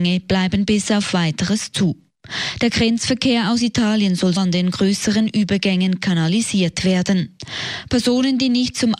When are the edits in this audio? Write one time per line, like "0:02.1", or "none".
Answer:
0:04.4